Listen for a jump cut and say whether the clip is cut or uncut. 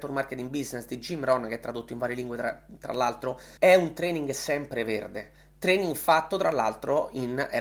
cut